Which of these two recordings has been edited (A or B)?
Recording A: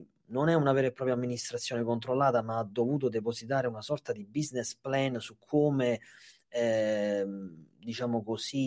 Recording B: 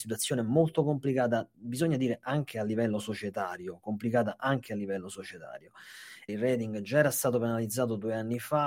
B